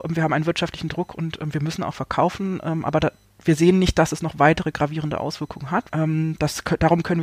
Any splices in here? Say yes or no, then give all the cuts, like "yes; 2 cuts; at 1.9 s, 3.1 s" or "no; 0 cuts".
yes; 1 cut; at 5.9 s